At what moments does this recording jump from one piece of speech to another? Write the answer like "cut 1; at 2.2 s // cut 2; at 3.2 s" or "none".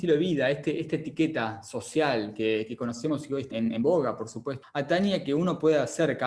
cut 1; at 3.5 s // cut 2; at 4.6 s

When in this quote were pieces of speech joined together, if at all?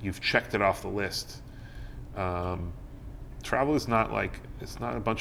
none

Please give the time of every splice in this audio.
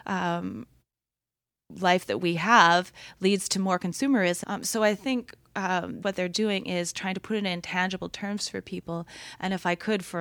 cut 1; at 4.4 s // cut 2; at 6.0 s

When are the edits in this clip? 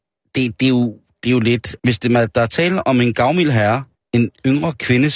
cut 1; at 1.8 s // cut 2; at 3.9 s

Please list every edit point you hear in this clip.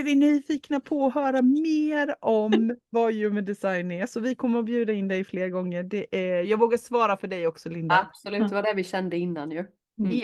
cut 1; at 6.4 s

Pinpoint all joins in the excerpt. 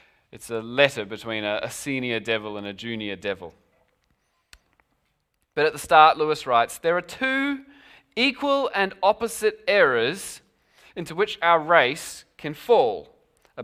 none

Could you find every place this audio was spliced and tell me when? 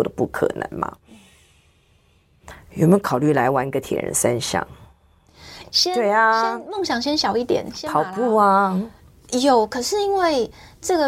cut 1; at 5.6 s

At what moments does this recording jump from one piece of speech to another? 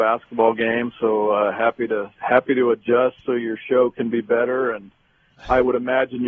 none

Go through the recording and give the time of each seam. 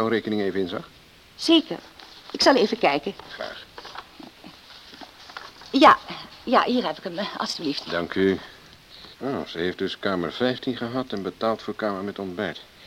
cut 1; at 9.1 s

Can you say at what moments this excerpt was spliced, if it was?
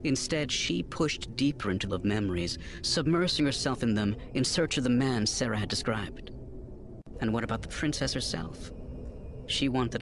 cut 1; at 1.9 s // cut 2; at 7.1 s

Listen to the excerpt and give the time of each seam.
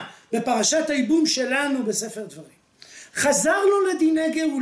cut 1; at 3.1 s

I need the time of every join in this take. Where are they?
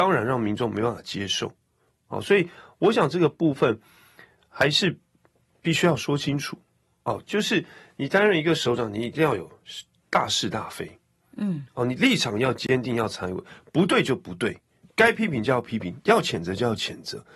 none

